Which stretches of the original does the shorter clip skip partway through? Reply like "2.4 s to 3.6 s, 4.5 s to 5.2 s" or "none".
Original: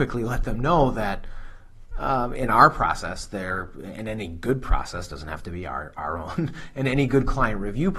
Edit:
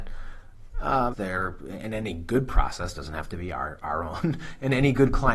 2.3 s to 3.3 s